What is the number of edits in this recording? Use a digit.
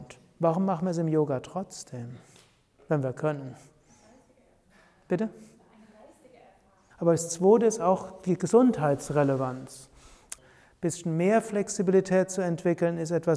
2